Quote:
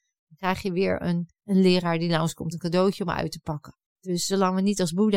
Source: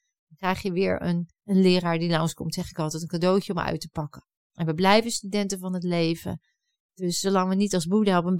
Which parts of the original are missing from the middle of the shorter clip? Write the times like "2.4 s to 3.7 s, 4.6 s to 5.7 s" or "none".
2.5 s to 3.0 s, 4.3 s to 6.8 s